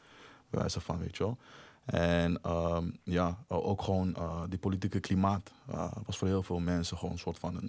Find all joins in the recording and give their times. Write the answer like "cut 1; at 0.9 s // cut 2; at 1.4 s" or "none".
none